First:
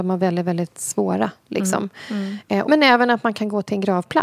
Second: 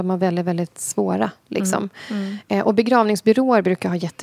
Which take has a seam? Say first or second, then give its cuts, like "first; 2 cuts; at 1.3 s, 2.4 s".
first; 1 cut; at 2.6 s